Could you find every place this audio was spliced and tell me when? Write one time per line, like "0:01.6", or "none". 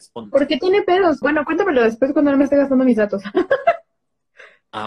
0:01.2